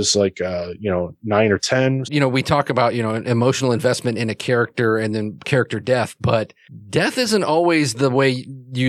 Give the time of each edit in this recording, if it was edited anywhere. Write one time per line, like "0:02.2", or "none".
0:02.0